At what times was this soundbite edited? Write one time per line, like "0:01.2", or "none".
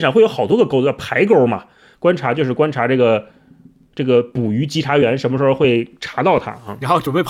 0:01.9